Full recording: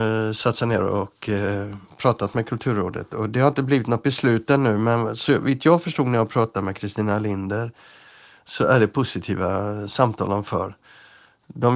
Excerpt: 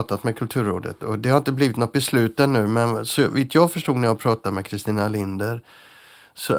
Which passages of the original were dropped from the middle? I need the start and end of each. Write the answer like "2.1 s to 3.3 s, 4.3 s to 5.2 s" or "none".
none